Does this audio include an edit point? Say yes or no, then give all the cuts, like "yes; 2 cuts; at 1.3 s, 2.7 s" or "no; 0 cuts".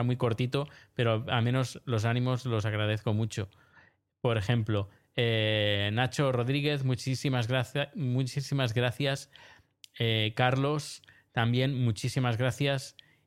no; 0 cuts